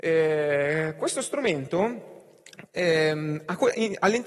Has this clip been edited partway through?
no; 0 cuts

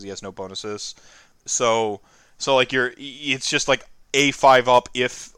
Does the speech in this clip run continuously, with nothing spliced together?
no; 1 cut; at 1.3 s

